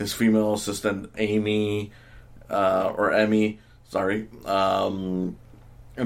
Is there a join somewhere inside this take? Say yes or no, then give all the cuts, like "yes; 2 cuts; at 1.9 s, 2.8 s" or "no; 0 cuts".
yes; 1 cut; at 1.1 s